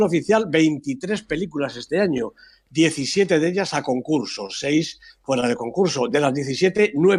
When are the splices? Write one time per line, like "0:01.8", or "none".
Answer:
none

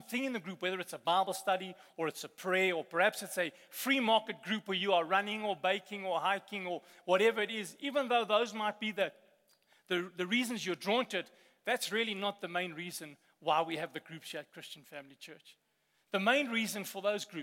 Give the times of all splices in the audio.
none

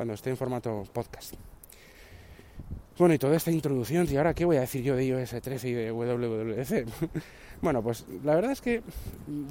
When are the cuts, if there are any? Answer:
0:04.1

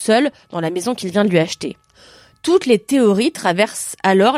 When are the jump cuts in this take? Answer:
none

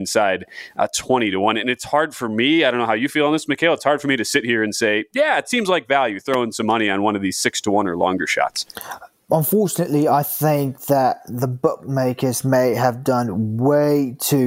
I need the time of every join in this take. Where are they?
none

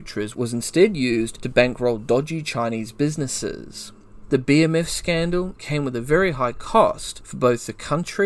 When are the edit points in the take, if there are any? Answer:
0:05.6

